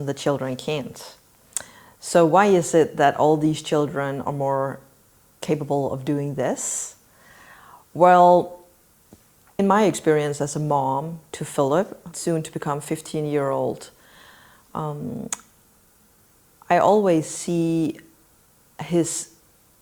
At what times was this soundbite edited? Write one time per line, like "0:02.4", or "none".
0:09.6
0:12.1